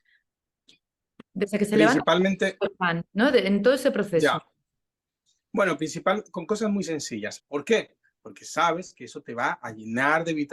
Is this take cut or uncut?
cut